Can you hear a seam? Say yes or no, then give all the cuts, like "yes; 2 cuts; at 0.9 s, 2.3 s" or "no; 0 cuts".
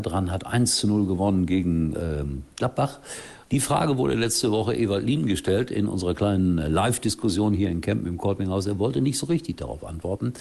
yes; 1 cut; at 3.5 s